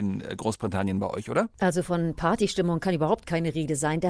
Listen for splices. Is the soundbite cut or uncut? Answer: cut